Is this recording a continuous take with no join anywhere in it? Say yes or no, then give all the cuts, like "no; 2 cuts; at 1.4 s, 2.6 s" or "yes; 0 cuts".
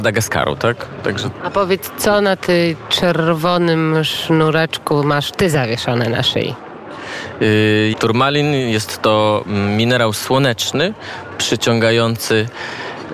no; 1 cut; at 7.9 s